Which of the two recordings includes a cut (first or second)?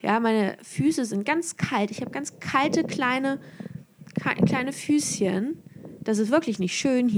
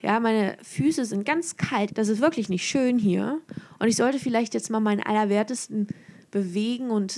second